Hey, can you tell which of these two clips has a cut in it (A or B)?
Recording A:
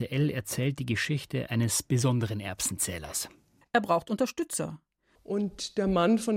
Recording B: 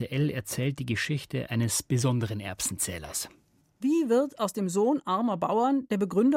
A